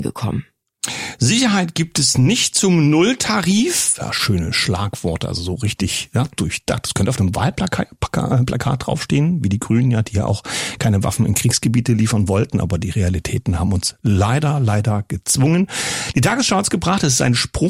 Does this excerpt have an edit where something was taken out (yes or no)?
no